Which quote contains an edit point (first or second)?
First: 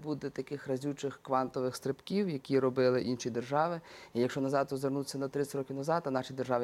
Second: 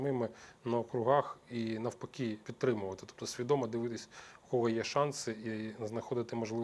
second